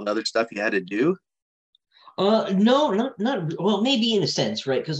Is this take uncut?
yes; 0 cuts

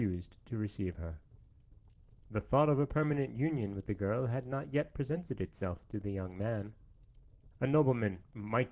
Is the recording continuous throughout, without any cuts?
no; 1 cut; at 7.5 s

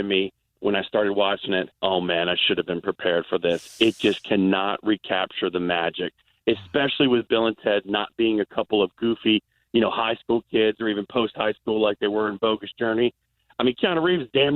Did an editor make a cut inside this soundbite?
yes; 1 cut; at 1.7 s

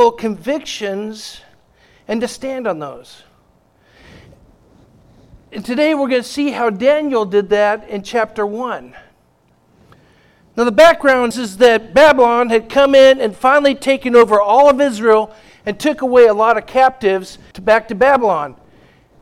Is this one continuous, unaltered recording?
no; 2 cuts; at 11.3 s, 17.5 s

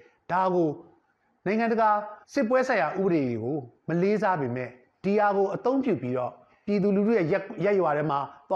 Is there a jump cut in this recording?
yes; 1 cut; at 2.2 s

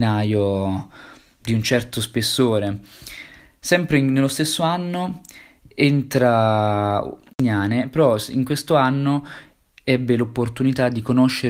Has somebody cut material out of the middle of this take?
no; 0 cuts

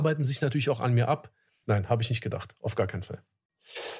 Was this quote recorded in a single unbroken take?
no; 1 cut; at 1.6 s

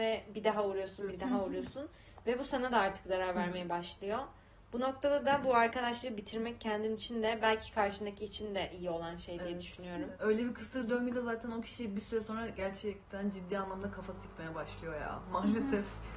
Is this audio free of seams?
no; 2 cuts; at 1.1 s, 10.1 s

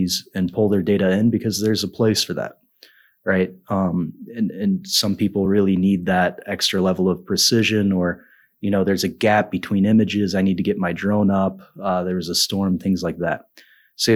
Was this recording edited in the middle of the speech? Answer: no; 0 cuts

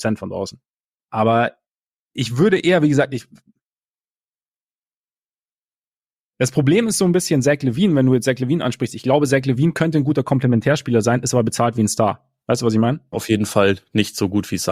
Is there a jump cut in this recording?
yes; 2 cuts; at 0.9 s, 13.1 s

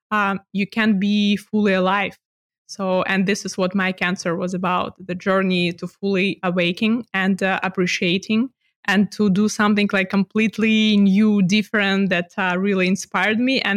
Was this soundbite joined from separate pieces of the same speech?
no; 0 cuts

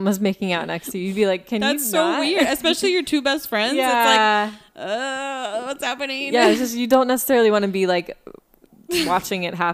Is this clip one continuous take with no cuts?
yes; 0 cuts

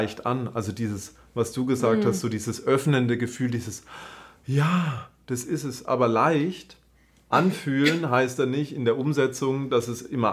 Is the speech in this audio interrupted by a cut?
no; 0 cuts

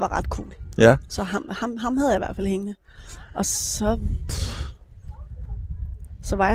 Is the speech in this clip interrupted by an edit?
no; 0 cuts

